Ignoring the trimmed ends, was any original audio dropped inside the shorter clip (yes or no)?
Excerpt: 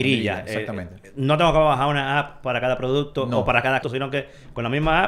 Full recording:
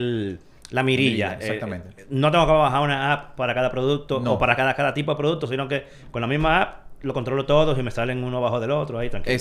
yes